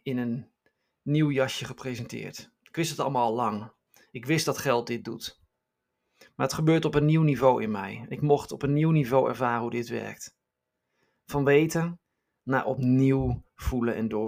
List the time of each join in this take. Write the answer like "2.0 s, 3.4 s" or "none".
none